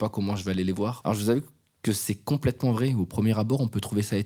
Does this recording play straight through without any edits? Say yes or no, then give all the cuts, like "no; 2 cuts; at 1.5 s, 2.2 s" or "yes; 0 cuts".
no; 1 cut; at 1.0 s